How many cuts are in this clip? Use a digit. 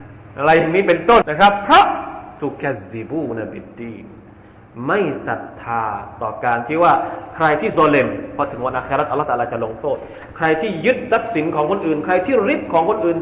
1